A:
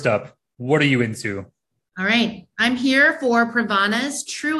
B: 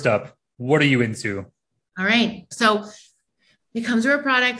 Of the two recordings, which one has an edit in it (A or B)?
B